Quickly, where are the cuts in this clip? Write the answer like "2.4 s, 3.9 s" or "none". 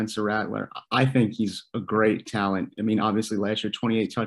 none